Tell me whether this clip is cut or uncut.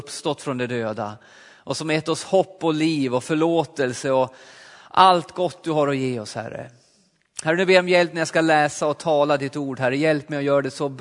uncut